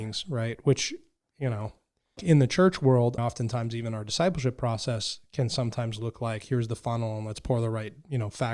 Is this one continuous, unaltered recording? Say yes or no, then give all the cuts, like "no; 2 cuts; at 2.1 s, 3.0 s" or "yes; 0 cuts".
no; 2 cuts; at 2.2 s, 3.2 s